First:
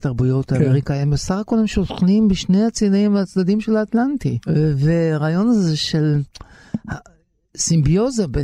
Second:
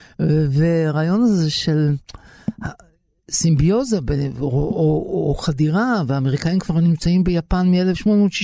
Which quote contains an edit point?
first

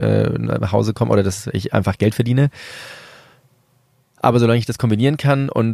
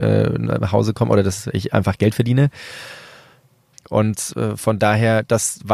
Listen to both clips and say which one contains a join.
second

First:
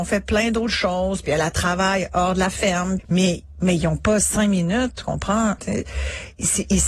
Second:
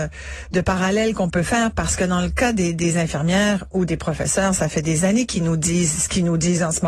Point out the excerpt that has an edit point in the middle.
first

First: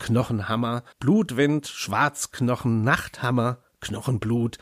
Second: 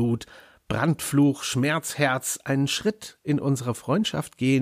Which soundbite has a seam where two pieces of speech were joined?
first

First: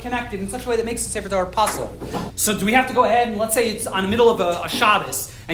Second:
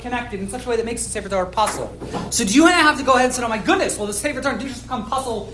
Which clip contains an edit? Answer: first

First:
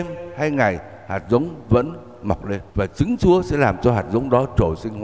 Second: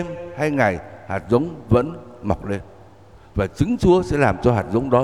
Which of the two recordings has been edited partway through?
first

